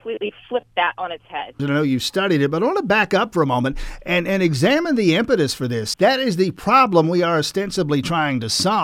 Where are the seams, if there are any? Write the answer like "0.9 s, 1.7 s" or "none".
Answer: 1.6 s, 5.9 s